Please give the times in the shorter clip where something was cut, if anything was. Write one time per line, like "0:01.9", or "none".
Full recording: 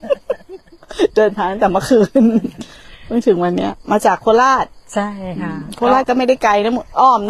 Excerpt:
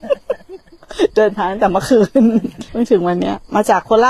0:02.7